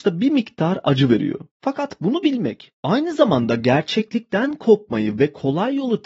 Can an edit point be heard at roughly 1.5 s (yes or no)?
yes